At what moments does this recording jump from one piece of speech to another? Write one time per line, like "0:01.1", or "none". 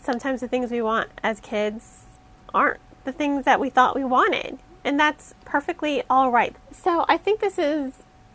0:06.5

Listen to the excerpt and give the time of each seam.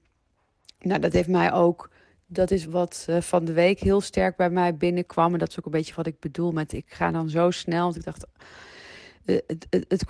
0:02.6

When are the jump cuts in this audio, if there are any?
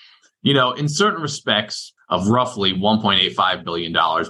0:02.0

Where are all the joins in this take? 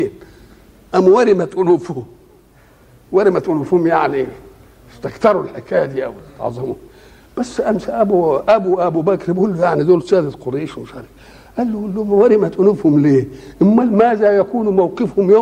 none

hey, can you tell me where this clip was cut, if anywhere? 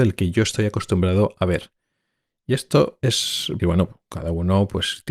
0:03.6

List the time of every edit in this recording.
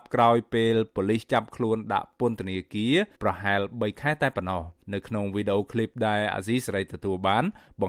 0:03.1
0:04.8

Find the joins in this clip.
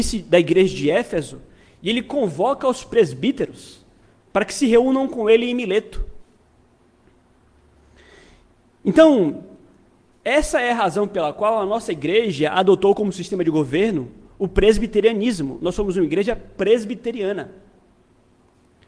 none

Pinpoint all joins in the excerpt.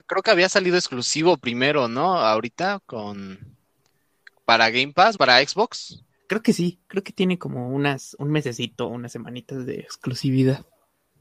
0:05.2

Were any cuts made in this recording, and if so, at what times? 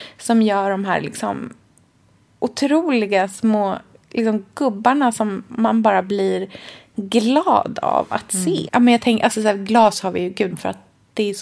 0:08.7
0:10.5

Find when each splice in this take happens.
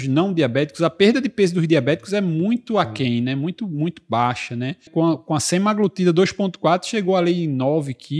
0:04.9

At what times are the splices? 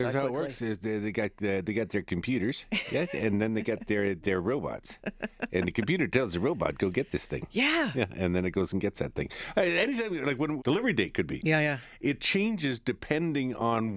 0:10.6

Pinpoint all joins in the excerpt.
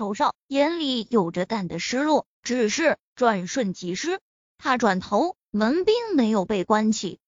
0:01.5
0:04.5

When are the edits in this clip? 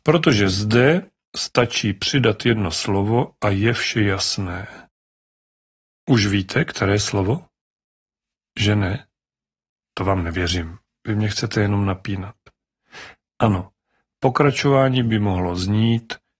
none

